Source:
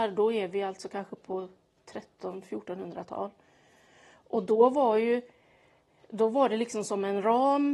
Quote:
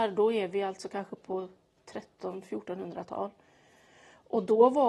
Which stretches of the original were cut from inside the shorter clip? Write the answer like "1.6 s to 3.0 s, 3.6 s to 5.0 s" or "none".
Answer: none